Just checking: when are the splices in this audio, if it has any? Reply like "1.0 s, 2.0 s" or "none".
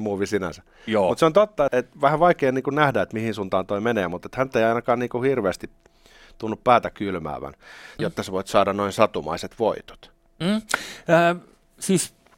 1.7 s, 8.0 s